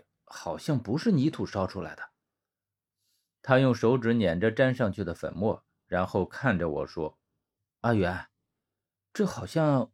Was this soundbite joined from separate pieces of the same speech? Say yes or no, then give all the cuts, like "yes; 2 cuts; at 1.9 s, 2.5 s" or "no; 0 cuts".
no; 0 cuts